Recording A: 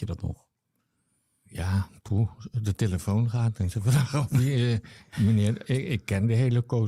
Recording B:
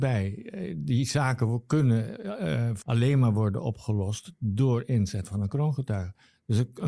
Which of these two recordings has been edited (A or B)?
B